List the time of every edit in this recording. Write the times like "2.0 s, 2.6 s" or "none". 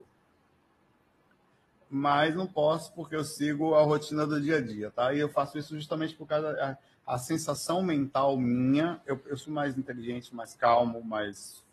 9.4 s